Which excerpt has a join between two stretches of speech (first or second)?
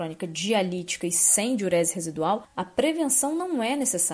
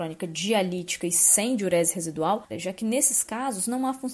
second